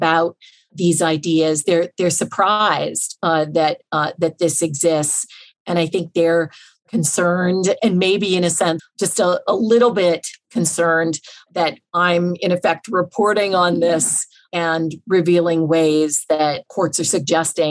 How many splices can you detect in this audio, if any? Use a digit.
1